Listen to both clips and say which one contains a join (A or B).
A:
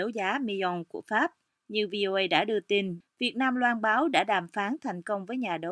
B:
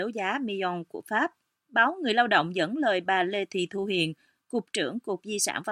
A